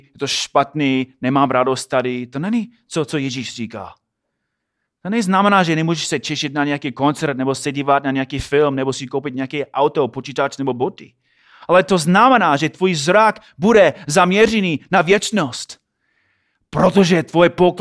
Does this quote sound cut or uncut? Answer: uncut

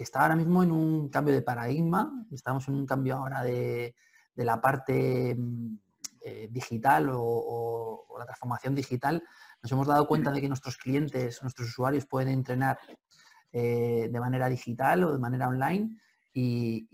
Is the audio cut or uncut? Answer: uncut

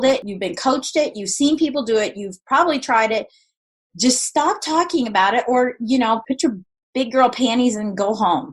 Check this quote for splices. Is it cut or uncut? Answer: uncut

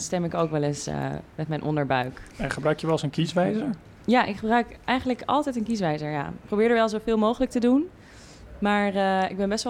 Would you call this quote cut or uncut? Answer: uncut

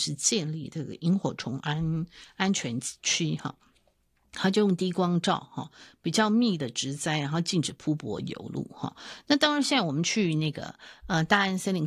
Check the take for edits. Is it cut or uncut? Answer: uncut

